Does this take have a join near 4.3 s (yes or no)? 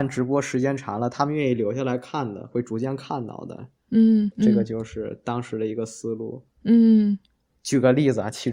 yes